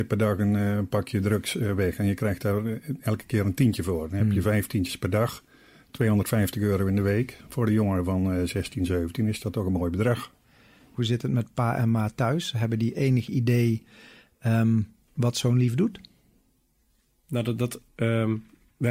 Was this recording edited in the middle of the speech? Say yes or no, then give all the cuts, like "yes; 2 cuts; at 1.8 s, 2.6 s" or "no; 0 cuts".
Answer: no; 0 cuts